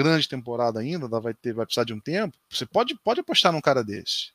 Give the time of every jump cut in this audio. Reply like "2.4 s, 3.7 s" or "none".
2.4 s